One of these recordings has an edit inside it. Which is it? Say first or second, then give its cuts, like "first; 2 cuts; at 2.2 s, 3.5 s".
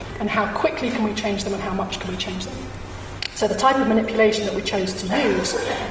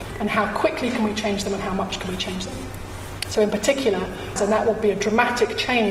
second; 2 cuts; at 3.2 s, 4.4 s